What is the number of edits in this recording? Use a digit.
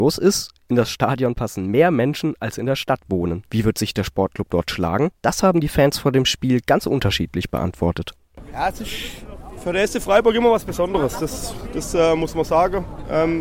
0